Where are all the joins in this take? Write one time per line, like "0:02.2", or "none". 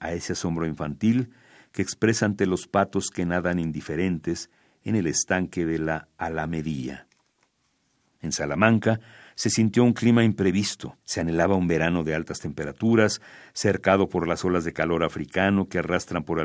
0:08.2
0:11.0